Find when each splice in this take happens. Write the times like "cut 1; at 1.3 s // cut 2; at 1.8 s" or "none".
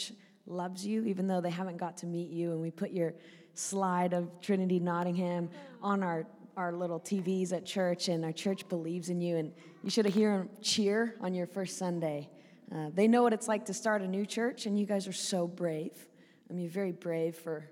none